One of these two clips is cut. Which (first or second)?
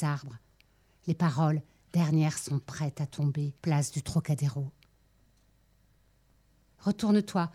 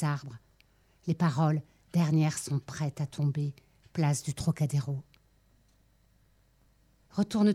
first